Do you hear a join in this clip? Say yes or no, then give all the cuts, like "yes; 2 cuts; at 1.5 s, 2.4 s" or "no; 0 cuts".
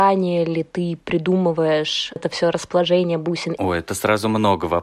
yes; 1 cut; at 3.5 s